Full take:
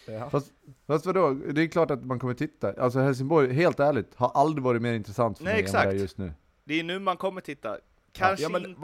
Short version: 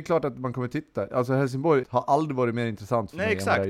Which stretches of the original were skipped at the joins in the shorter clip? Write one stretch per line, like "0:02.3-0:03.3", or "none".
0:03.5-0:04.1